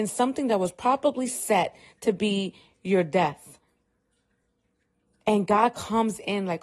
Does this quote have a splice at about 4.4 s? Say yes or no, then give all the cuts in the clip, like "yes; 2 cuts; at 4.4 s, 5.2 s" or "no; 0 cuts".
no; 0 cuts